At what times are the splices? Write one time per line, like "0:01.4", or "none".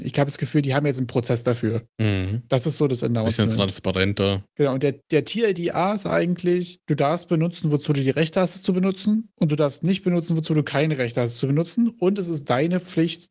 none